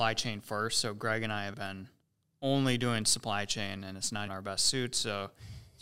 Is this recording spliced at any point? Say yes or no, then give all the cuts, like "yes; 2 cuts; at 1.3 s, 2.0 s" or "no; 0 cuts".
yes; 2 cuts; at 1.5 s, 4.3 s